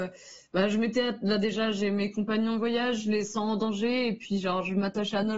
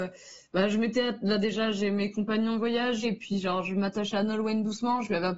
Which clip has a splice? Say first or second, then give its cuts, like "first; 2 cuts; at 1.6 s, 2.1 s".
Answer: second; 1 cut; at 3.0 s